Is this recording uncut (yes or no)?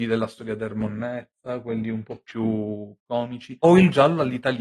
yes